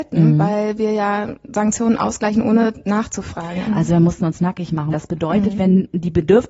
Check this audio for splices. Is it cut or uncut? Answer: cut